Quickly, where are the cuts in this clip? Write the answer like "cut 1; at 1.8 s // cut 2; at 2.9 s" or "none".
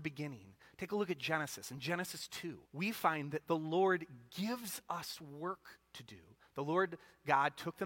cut 1; at 2.7 s